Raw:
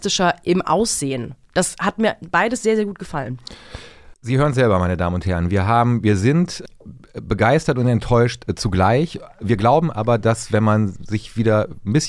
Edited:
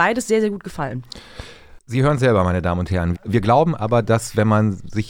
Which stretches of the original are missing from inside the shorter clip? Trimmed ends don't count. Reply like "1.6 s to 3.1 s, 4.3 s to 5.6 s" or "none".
5.5 s to 9.3 s